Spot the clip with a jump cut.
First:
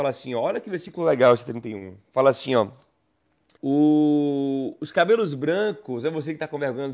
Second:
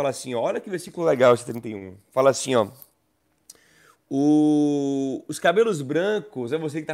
first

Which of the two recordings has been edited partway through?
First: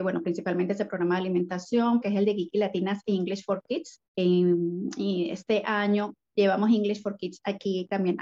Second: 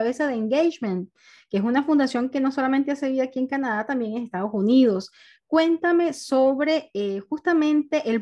first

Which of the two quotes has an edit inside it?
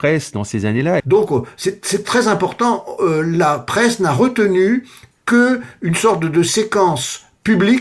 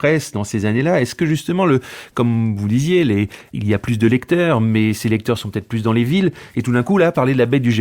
first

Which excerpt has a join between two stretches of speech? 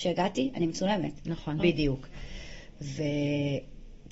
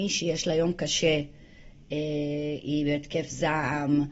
first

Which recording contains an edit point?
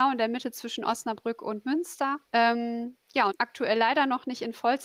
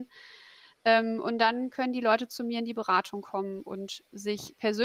first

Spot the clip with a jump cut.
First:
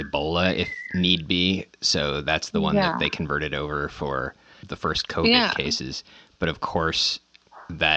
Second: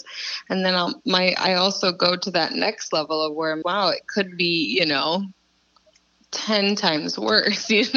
second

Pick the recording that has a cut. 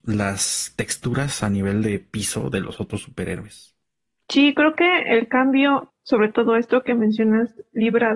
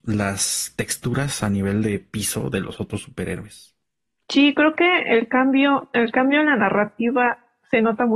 first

